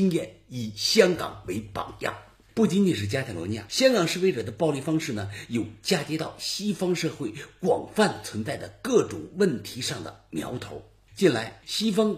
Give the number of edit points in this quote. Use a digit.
0